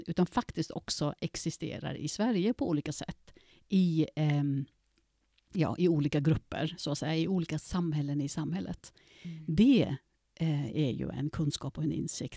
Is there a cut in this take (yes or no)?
no